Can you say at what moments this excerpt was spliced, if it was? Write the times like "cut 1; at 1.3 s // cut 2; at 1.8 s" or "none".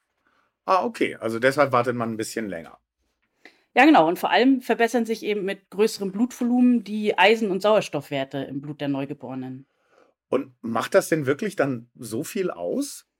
none